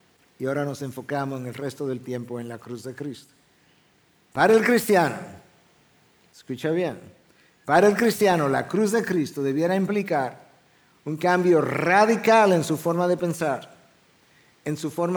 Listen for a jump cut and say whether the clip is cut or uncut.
uncut